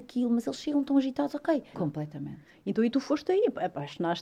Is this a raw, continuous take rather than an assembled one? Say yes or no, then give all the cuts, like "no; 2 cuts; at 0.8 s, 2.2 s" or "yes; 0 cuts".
no; 1 cut; at 1.7 s